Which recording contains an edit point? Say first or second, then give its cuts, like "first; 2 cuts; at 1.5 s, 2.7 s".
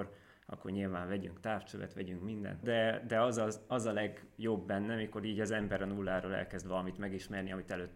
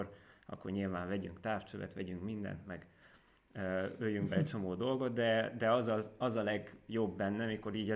first; 1 cut; at 2.6 s